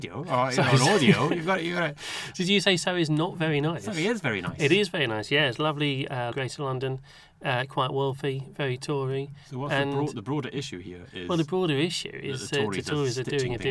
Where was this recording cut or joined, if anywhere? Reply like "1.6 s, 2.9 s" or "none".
6.3 s